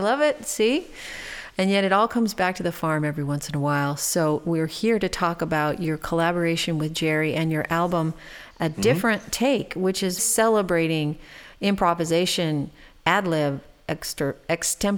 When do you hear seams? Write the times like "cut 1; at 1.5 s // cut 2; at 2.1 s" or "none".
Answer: cut 1; at 10.2 s